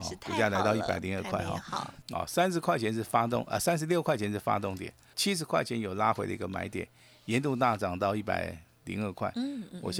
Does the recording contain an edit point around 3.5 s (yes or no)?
no